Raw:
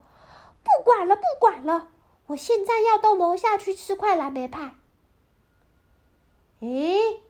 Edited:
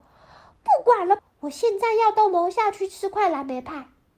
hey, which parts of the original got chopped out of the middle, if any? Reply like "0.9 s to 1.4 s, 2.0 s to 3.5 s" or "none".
1.2 s to 2.1 s